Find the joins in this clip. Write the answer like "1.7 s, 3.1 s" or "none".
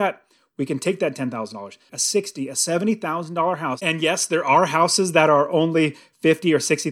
1.9 s